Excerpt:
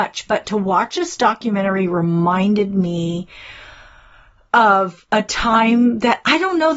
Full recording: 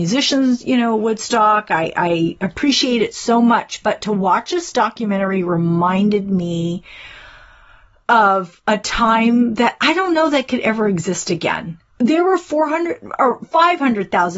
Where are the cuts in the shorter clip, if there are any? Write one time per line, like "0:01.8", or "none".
none